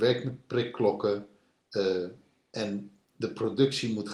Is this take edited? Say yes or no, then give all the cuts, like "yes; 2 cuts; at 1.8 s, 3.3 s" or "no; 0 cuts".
no; 0 cuts